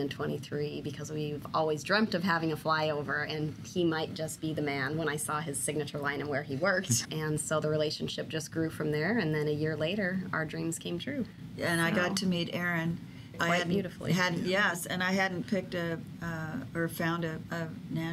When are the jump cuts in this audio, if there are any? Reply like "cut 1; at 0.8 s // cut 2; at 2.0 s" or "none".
cut 1; at 7.0 s // cut 2; at 13.3 s